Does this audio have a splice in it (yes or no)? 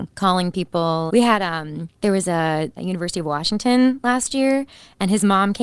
yes